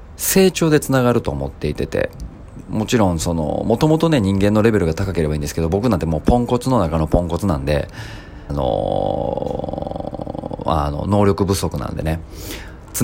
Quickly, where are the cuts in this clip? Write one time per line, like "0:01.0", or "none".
0:08.5
0:10.6